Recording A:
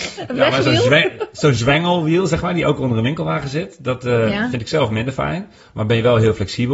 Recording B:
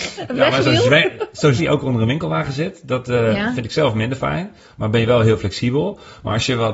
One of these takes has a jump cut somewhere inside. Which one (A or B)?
B